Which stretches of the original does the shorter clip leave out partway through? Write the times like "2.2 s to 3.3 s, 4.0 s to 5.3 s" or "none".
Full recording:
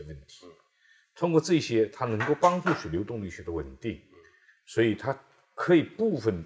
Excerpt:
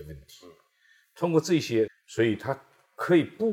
1.9 s to 4.5 s